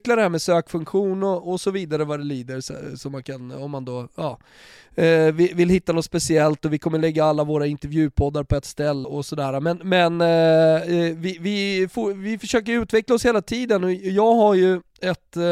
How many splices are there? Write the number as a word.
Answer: one